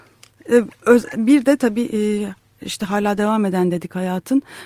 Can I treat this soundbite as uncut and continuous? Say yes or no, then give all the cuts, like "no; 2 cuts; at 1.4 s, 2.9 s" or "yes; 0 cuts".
yes; 0 cuts